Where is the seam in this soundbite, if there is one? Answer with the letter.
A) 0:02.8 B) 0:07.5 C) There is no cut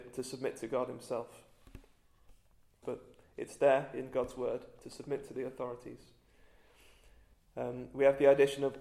A